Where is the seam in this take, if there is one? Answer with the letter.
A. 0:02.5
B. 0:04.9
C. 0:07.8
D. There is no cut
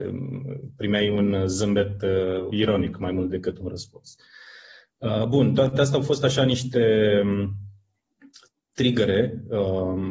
A